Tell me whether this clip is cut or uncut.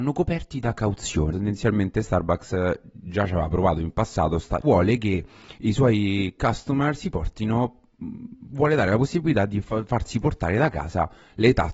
cut